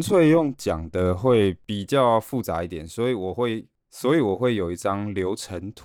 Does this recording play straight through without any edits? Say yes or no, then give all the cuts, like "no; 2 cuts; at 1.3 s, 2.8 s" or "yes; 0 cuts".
yes; 0 cuts